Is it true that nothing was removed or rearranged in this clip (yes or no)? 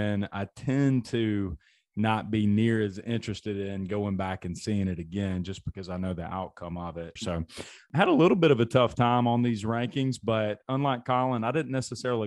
no